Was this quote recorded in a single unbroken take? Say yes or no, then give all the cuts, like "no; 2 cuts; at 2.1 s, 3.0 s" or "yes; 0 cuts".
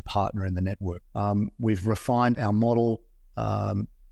no; 2 cuts; at 1.0 s, 2.3 s